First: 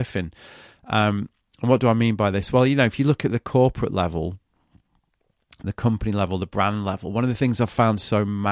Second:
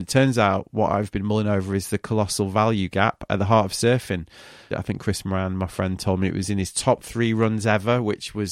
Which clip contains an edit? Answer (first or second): second